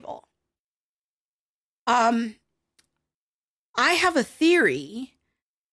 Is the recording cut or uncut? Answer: uncut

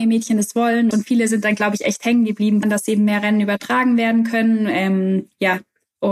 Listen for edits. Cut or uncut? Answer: cut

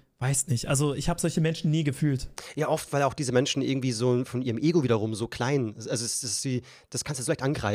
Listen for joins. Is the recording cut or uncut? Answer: uncut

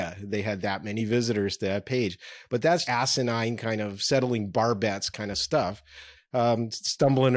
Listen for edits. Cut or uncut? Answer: cut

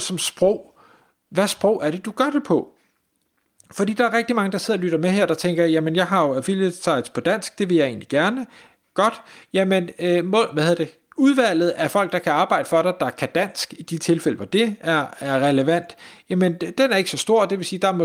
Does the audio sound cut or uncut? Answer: uncut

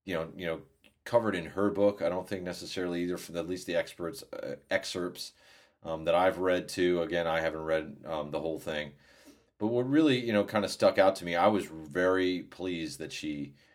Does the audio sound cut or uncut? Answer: uncut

